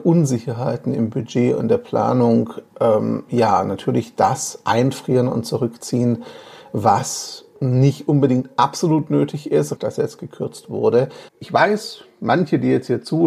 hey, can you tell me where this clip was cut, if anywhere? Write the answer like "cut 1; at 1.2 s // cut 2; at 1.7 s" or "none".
cut 1; at 7.5 s // cut 2; at 9.8 s // cut 3; at 11.3 s